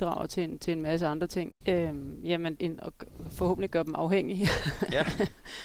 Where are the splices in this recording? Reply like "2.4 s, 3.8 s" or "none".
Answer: 1.5 s, 2.5 s